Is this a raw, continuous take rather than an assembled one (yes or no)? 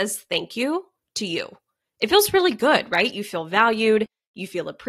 yes